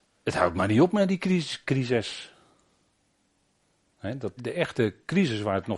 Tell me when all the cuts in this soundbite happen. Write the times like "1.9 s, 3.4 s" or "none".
1.6 s, 4.4 s